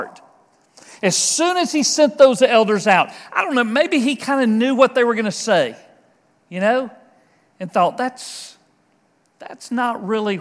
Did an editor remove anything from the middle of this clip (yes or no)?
no